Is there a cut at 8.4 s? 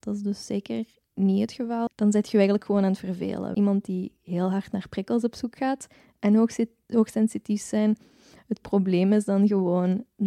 no; 2 cuts; at 1.9 s, 3.5 s

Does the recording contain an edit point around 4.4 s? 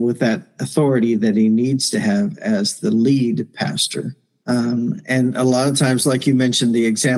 yes; 1 cut; at 4.4 s

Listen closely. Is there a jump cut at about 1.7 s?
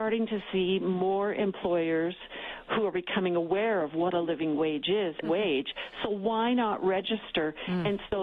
no; 1 cut; at 5.2 s

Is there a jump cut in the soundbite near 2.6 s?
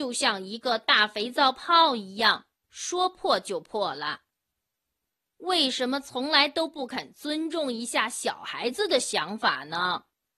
no; 1 cut; at 5.3 s

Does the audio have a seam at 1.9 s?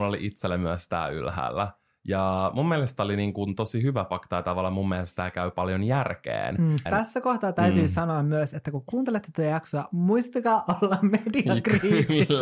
no; 1 cut; at 6.9 s

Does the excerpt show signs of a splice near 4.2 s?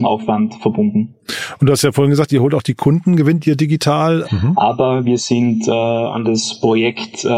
yes; 1 cut; at 4.2 s

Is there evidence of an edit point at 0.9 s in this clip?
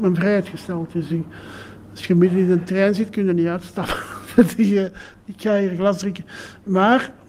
no; 0 cuts

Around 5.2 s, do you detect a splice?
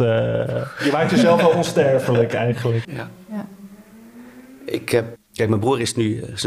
yes; 2 cuts; at 2.8 s, 5.2 s

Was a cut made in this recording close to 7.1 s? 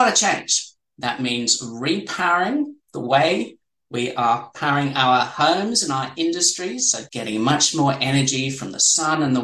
yes; 1 cut; at 7.1 s

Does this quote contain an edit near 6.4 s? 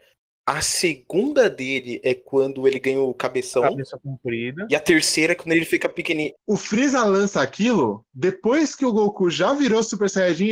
yes; 1 cut; at 6.4 s

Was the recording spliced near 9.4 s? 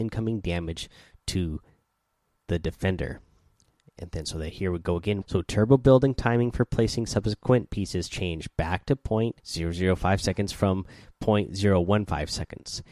yes; 2 cuts; at 5.2 s, 9.4 s

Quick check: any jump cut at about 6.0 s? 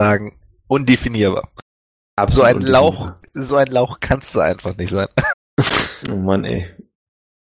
yes; 1 cut; at 6.0 s

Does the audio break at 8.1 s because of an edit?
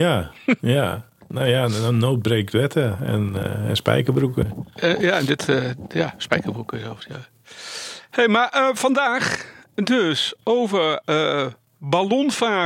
no; 0 cuts

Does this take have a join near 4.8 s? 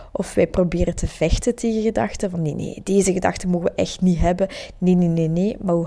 no; 0 cuts

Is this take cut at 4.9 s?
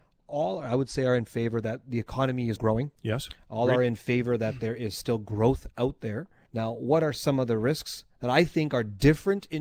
no; 2 cuts; at 2.6 s, 6.5 s

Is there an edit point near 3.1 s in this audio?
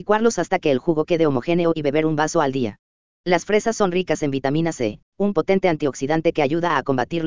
yes; 1 cut; at 3.1 s

